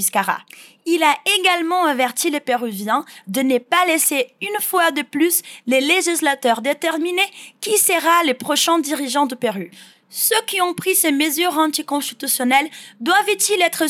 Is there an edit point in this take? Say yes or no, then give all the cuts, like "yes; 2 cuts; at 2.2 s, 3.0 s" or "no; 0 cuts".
no; 0 cuts